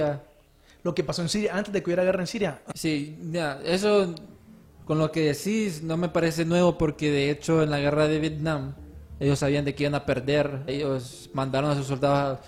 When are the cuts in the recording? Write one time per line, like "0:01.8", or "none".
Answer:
0:02.7
0:10.7